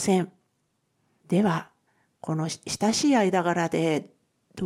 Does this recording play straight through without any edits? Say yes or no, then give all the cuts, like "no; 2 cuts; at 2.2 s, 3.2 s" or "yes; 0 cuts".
no; 1 cut; at 1.2 s